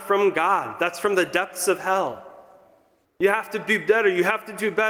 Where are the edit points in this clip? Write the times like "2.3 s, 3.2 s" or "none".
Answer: 3.0 s